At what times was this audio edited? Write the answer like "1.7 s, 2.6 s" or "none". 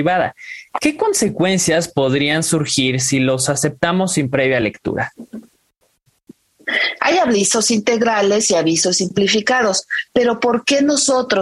7.0 s